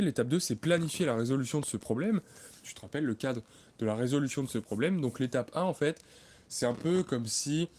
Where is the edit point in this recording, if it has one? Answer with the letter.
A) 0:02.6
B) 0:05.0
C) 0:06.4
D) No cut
A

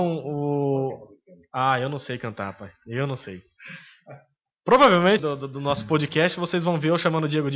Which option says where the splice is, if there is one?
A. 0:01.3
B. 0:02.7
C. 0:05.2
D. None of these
C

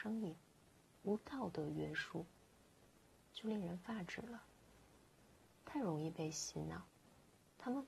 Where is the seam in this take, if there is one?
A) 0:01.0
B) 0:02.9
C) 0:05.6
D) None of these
C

